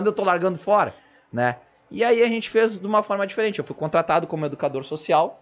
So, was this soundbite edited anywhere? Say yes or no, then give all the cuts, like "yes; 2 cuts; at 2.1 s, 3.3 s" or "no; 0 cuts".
no; 0 cuts